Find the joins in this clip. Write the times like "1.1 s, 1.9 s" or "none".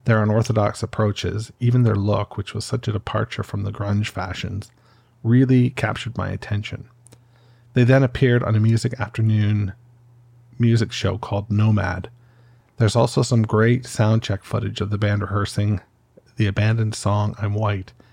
12.6 s